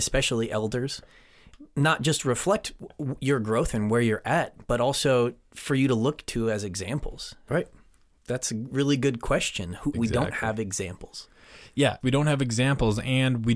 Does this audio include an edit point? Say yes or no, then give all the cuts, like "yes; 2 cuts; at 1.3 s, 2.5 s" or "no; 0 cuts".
yes; 3 cuts; at 7.5 s, 9.9 s, 12.0 s